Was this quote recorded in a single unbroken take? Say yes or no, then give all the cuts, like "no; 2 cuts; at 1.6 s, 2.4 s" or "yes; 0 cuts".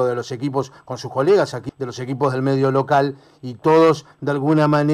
no; 1 cut; at 1.7 s